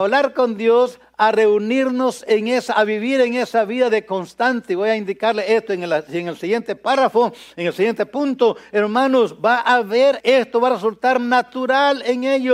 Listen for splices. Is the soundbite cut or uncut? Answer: cut